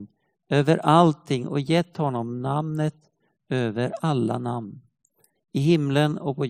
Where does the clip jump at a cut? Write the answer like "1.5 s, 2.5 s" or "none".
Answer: 5.3 s